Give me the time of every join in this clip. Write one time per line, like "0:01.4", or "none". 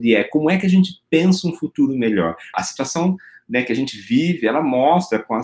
0:02.5

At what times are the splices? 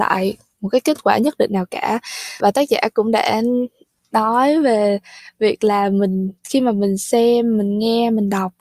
0:02.4
0:06.4

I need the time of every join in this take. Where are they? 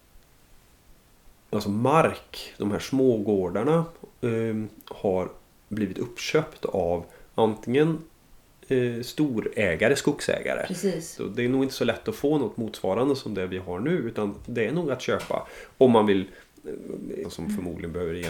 0:11.2
0:17.2

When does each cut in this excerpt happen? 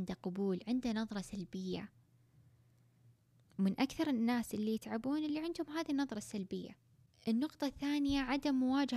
none

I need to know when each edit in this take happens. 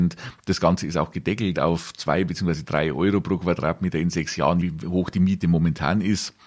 0:04.6

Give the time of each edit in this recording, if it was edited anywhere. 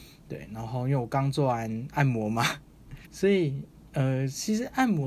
0:03.0

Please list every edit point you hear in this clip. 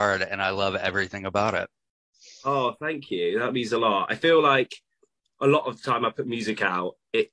none

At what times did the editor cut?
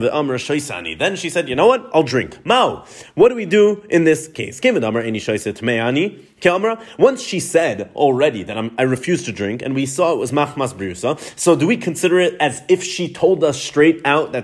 none

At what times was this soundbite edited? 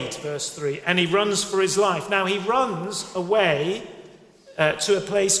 none

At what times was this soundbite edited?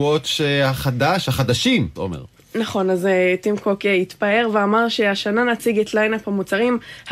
0:02.0

